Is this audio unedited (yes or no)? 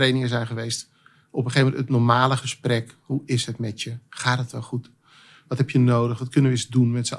yes